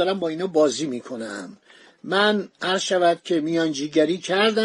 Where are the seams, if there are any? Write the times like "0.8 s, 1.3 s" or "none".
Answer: none